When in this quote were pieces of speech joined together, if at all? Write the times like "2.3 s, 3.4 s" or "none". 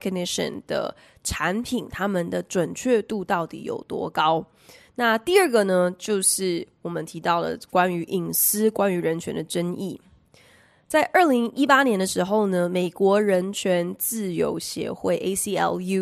none